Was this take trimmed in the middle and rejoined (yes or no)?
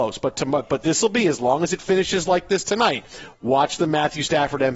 no